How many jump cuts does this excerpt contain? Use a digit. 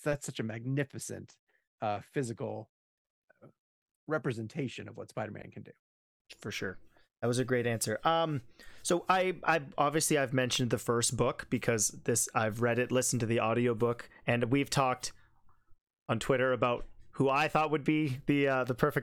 0